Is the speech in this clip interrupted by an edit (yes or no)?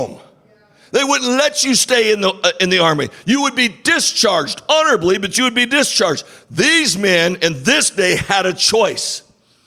no